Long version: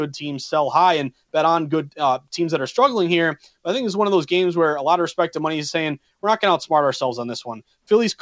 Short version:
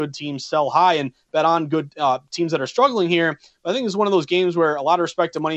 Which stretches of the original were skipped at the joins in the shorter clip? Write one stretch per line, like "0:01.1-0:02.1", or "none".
none

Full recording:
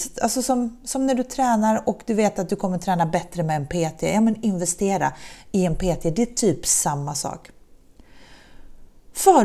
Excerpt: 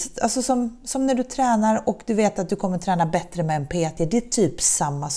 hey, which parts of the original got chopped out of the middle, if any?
0:04.0-0:06.0

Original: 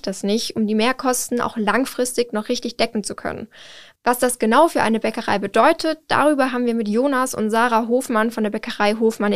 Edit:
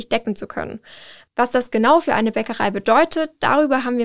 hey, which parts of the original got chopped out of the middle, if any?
none

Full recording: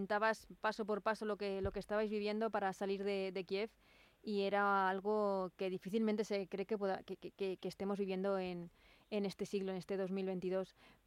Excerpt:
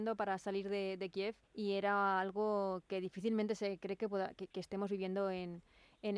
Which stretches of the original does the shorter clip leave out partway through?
0:03.8-0:04.1
0:07.2-0:07.6

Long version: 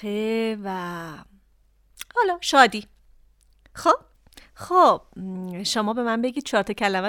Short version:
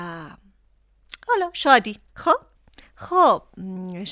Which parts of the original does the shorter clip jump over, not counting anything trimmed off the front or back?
0:03.0-0:03.7

